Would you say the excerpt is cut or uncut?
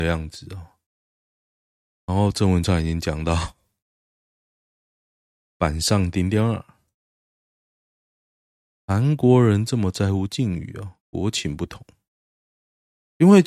uncut